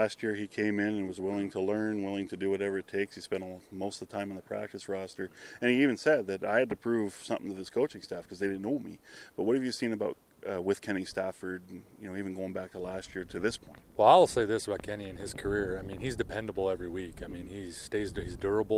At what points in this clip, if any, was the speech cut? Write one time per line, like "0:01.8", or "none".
none